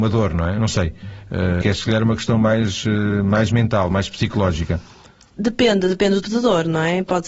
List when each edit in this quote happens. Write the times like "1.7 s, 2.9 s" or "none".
1.6 s, 6.2 s

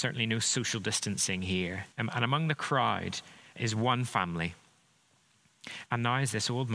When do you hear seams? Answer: 1.9 s, 3.6 s, 5.9 s

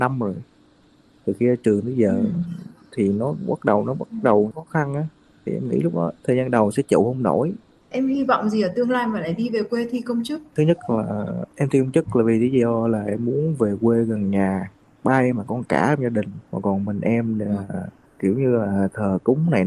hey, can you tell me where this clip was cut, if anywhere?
4.5 s, 6.2 s, 16.4 s

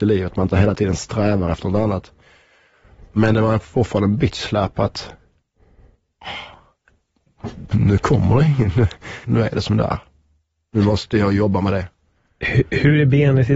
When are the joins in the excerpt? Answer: 7.7 s, 9.2 s

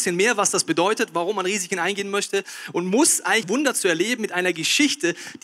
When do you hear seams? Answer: 3.4 s

